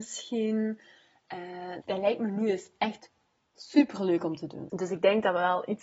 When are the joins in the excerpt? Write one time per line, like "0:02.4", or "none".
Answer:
0:01.8
0:04.7